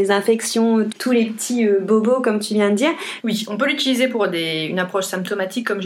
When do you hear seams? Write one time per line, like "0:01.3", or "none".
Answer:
0:00.9
0:03.2